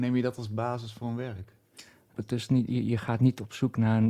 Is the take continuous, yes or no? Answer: no